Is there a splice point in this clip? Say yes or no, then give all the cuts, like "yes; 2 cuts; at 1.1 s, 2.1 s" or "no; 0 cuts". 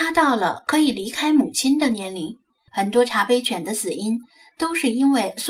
yes; 1 cut; at 2.7 s